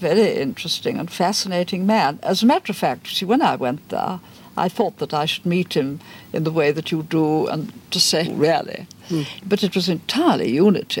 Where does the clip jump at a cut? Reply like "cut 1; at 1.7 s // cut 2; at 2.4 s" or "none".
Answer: cut 1; at 8.2 s